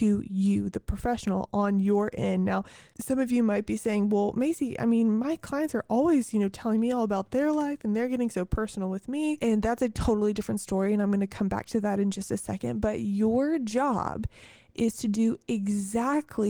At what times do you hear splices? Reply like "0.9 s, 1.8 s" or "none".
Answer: none